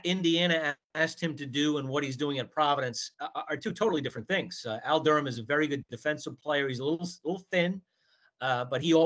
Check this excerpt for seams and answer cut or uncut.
uncut